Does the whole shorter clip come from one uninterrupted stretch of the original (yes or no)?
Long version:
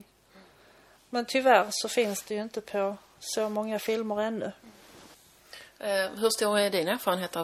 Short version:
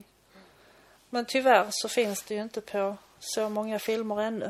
yes